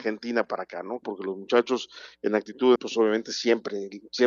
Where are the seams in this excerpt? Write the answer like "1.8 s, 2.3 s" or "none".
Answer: 1.0 s, 2.8 s